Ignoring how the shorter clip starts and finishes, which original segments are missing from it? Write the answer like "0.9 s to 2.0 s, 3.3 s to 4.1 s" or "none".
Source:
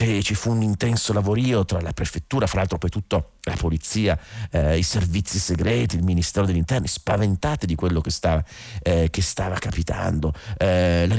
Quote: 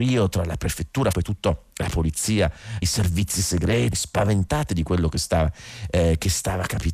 2.5 s to 2.8 s, 4.5 s to 4.8 s, 5.9 s to 6.8 s